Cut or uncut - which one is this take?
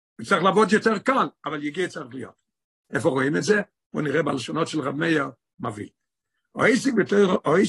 cut